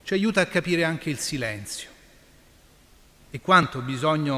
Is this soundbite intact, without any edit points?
no; 1 cut; at 3.2 s

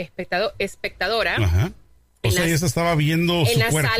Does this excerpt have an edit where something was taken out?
no; 0 cuts

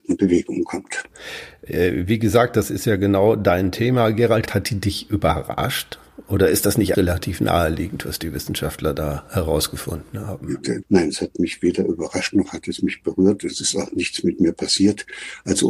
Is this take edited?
yes; 3 cuts; at 4.5 s, 6.9 s, 10.8 s

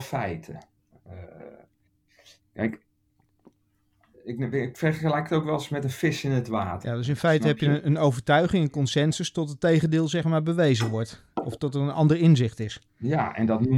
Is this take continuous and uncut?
no; 2 cuts; at 4.1 s, 6.8 s

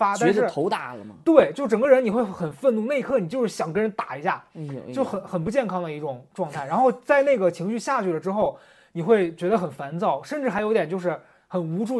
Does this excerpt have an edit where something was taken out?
no; 0 cuts

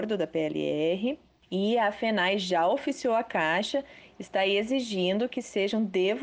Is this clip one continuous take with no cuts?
yes; 0 cuts

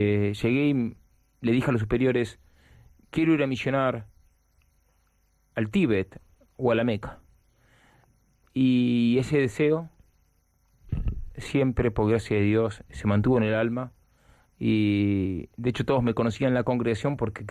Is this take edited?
no; 0 cuts

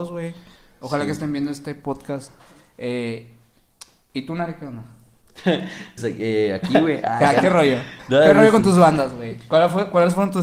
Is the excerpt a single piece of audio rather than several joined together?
no; 1 cut; at 6.0 s

